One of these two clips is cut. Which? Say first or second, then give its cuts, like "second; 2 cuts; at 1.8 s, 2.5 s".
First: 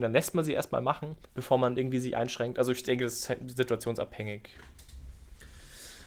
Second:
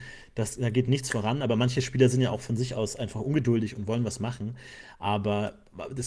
first; 1 cut; at 1.3 s